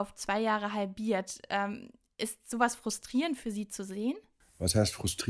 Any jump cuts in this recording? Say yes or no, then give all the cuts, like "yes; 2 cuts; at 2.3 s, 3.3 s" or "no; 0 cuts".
no; 0 cuts